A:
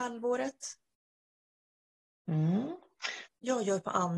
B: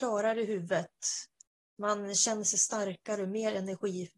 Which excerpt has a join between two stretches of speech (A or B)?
A